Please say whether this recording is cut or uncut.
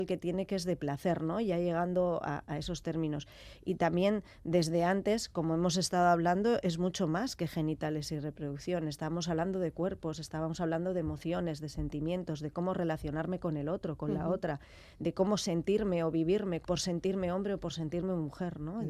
uncut